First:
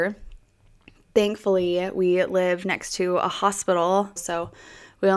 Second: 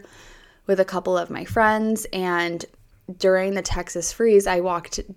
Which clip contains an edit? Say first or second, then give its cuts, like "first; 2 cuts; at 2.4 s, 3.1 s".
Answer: first; 1 cut; at 4.2 s